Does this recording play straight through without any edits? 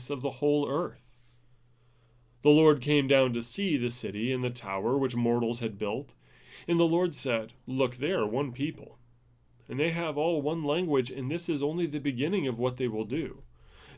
no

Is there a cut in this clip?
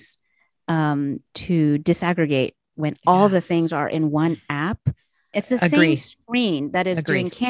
yes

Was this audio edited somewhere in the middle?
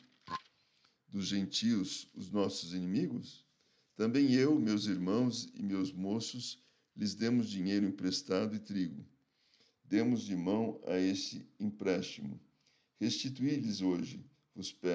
no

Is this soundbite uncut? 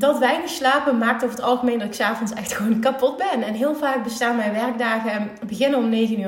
yes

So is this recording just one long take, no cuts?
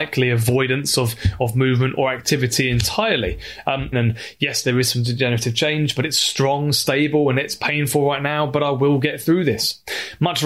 no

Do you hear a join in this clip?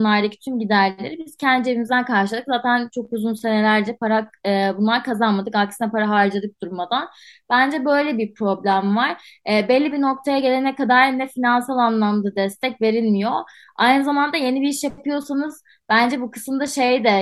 no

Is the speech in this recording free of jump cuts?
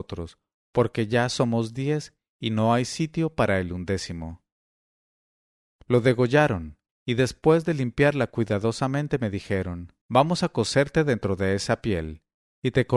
no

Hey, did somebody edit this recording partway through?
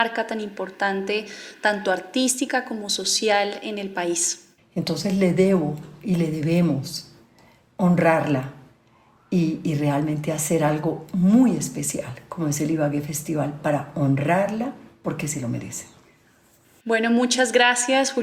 yes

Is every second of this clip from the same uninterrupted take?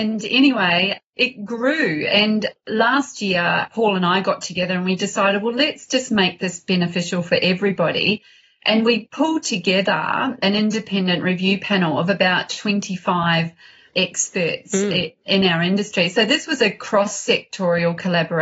yes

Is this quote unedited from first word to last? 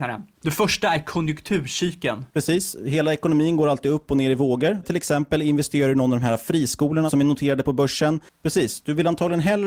no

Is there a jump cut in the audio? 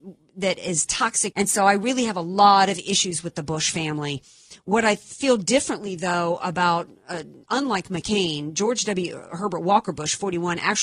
yes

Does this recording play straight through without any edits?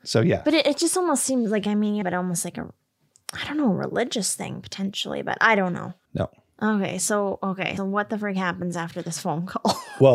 no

